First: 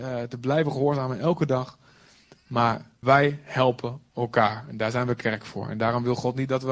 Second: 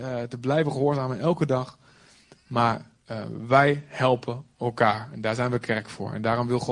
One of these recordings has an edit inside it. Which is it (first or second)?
first